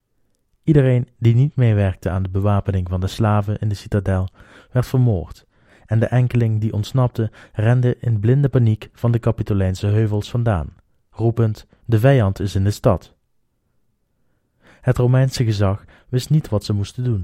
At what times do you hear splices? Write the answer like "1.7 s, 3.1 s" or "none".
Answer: 11.8 s